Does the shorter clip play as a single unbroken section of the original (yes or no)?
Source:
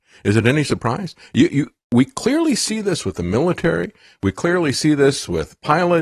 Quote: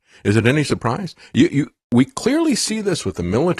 yes